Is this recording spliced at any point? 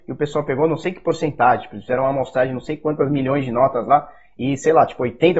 no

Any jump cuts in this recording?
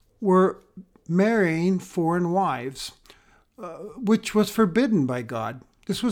no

